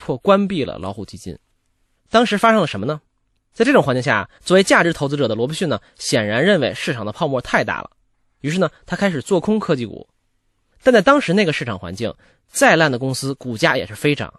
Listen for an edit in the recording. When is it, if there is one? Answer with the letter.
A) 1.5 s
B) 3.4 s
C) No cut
B